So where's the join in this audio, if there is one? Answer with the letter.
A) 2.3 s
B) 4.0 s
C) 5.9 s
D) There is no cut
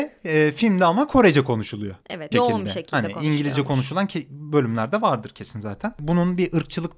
A